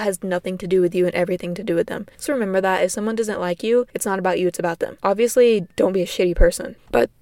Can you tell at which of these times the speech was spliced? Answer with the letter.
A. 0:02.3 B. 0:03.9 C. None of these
A